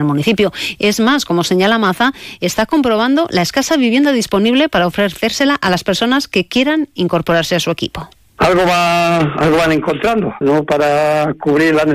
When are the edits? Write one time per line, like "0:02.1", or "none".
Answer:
0:10.4